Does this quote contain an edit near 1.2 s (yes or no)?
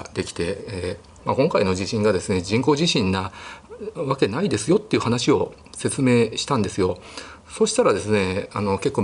yes